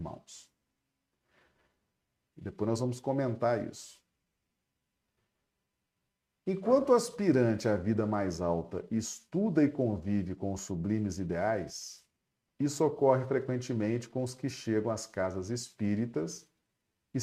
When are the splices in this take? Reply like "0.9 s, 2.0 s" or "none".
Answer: 2.3 s